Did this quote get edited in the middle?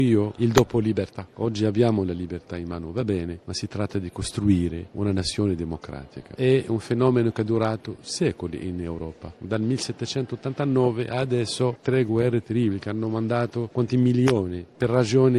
no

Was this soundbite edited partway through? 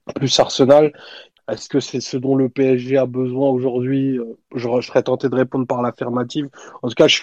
yes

